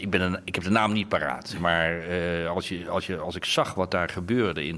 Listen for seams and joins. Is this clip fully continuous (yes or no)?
yes